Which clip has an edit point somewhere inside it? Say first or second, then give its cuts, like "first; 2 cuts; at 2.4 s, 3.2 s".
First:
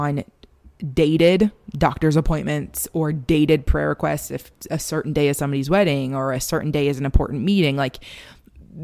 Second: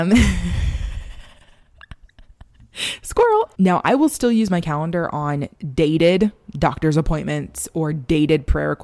second; 1 cut; at 5.5 s